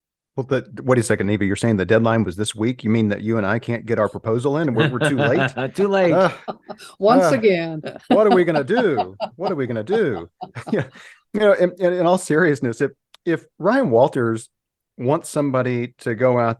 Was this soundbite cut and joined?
no; 0 cuts

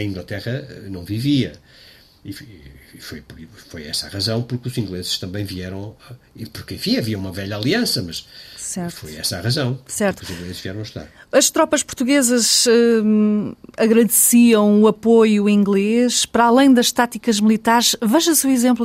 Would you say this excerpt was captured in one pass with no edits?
yes; 0 cuts

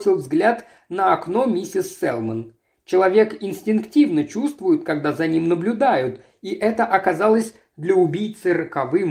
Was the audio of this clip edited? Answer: no; 0 cuts

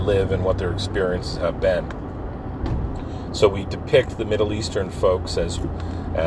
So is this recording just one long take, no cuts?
yes; 0 cuts

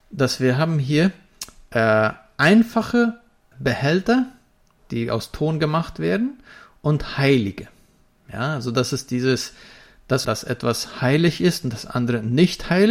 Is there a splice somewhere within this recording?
yes; 2 cuts; at 3.5 s, 10.2 s

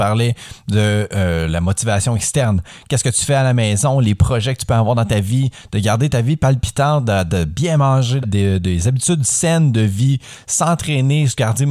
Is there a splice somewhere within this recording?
yes; 1 cut; at 8.2 s

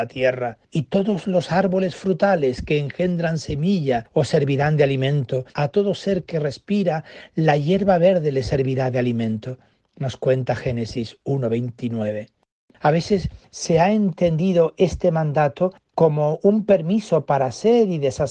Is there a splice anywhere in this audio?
yes; 1 cut; at 5.5 s

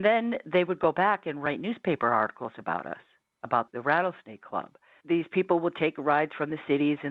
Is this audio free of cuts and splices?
no; 2 cuts; at 3.7 s, 5.0 s

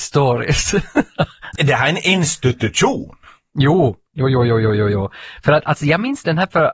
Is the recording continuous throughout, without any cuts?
no; 1 cut; at 1.6 s

